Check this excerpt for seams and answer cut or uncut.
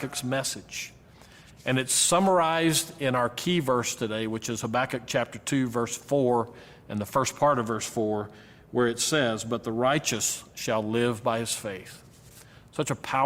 uncut